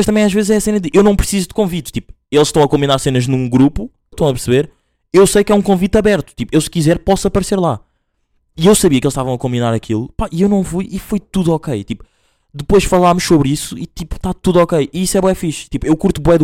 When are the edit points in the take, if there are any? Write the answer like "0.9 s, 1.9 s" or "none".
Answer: 4.1 s